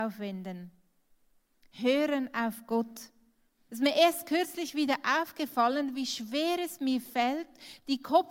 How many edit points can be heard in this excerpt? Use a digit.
1